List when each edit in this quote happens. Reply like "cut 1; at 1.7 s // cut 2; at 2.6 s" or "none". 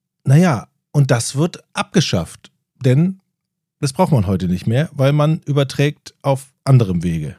none